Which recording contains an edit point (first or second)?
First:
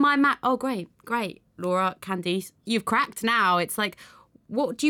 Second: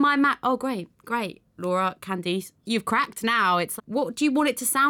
second